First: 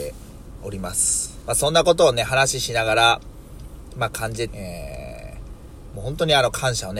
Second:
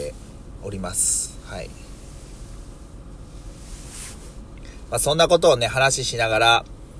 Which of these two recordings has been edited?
first; 2 cuts; at 1.4 s, 4.5 s

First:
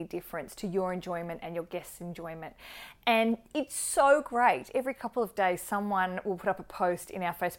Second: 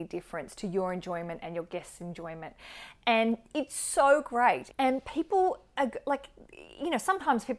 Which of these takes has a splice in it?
second; 1 cut; at 4.7 s

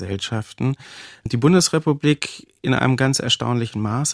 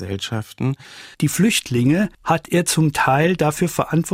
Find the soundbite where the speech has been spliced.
second; 1 cut; at 1.1 s

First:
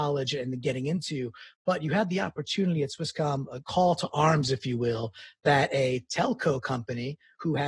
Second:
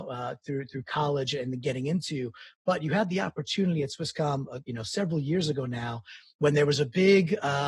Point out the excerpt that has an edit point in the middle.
first; 1 cut; at 3.6 s

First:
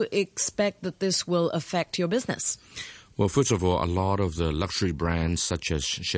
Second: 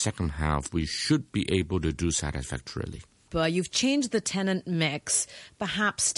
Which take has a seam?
second; 1 cut; at 3.3 s

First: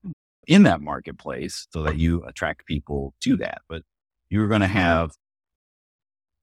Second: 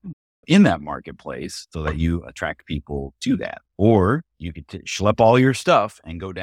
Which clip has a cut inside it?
second; 1 cut; at 3.7 s

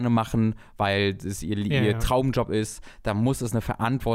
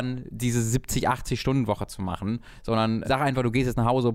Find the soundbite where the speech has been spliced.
second; 1 cut; at 3.0 s

